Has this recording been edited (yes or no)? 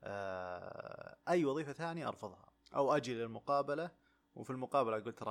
no